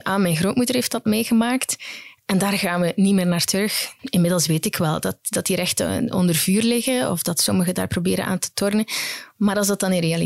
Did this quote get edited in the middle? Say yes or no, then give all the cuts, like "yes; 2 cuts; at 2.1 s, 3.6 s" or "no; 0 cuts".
yes; 1 cut; at 4.0 s